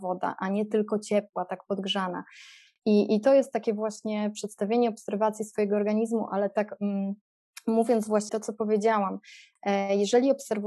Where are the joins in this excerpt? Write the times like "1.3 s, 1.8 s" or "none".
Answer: 2.7 s, 8.3 s